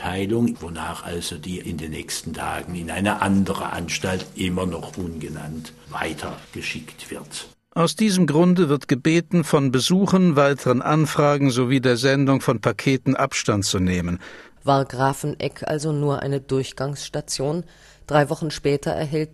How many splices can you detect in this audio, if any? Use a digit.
1